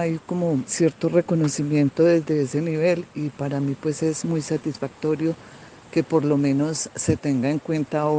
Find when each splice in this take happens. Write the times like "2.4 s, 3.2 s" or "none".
none